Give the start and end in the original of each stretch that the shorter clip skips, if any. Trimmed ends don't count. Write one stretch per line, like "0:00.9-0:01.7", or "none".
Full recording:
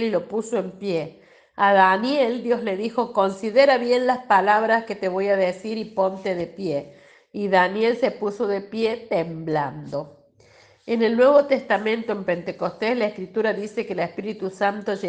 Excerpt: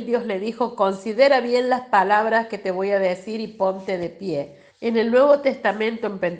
0:07.1-0:10.7